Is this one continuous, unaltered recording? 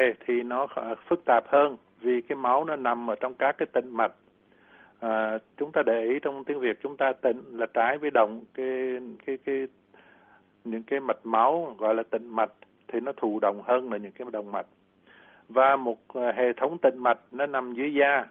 no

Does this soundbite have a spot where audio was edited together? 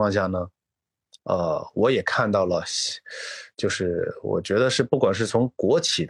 no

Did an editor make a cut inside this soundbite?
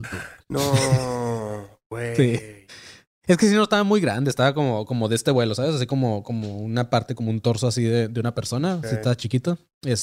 no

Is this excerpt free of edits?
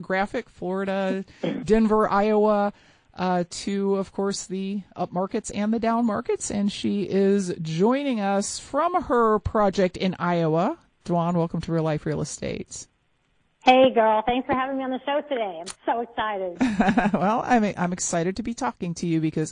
yes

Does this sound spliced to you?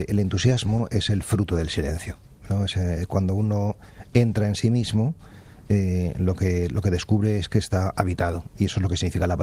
no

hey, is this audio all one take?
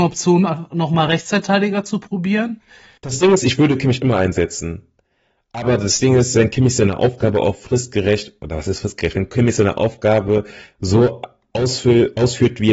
no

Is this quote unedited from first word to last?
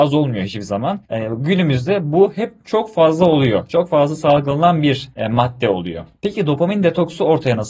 yes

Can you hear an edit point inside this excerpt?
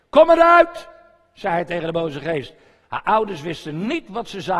yes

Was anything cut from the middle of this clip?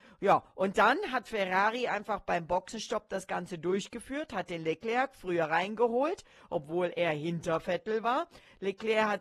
no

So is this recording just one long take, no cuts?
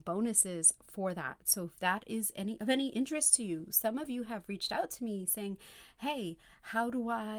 yes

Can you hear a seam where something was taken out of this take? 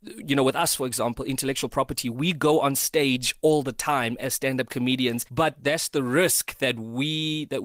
yes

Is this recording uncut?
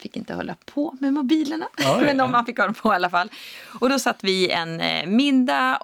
yes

